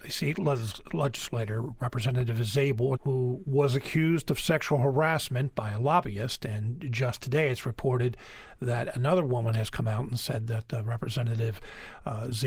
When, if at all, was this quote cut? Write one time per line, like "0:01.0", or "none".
0:03.0